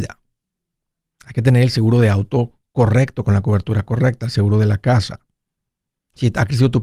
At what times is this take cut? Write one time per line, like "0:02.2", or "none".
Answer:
none